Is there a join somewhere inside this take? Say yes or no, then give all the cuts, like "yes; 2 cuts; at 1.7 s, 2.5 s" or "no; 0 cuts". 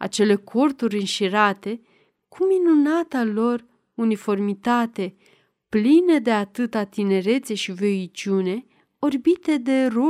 no; 0 cuts